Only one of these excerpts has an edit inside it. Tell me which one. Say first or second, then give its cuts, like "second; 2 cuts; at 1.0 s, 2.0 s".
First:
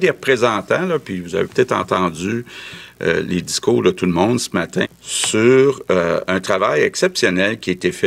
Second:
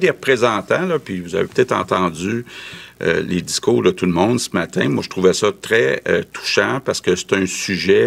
first; 1 cut; at 4.8 s